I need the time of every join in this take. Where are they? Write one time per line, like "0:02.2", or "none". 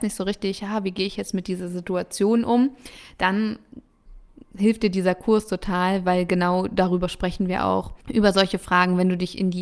0:08.0